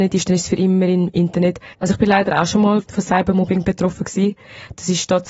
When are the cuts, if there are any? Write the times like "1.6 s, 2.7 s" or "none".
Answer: 1.7 s, 2.8 s